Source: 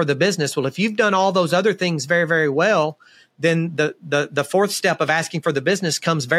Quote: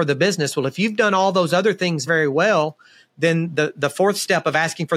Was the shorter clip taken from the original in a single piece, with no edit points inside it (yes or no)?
no